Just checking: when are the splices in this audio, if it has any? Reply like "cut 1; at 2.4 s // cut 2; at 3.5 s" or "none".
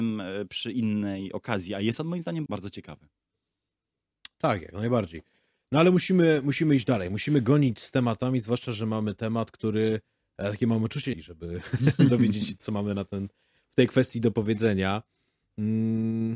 cut 1; at 2.5 s // cut 2; at 11.1 s